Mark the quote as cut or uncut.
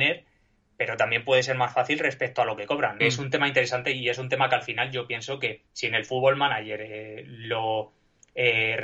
cut